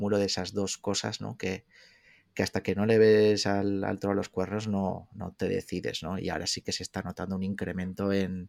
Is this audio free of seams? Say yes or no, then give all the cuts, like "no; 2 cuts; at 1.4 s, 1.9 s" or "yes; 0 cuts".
yes; 0 cuts